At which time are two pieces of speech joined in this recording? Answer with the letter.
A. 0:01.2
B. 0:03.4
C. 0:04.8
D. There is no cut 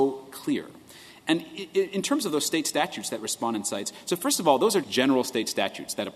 C